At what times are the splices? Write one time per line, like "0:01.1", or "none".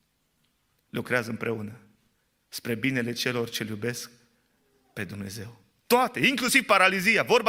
none